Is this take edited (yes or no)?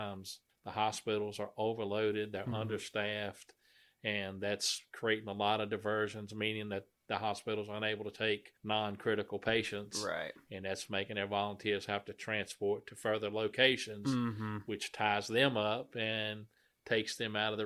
no